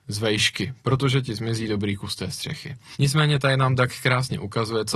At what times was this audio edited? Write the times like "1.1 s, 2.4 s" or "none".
2.9 s